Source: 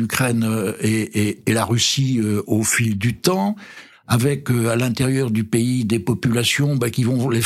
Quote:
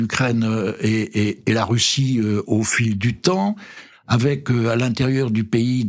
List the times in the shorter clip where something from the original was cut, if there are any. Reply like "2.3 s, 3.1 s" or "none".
none